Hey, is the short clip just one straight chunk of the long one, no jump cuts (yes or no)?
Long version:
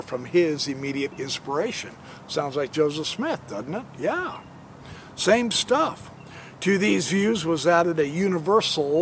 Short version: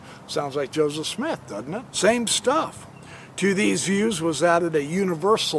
no